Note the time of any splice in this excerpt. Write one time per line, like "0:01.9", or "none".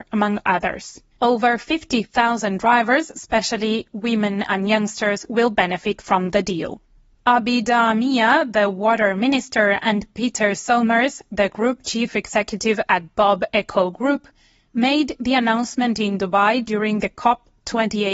0:01.2